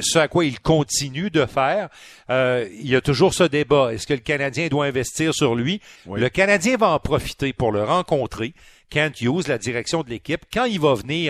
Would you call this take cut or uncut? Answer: cut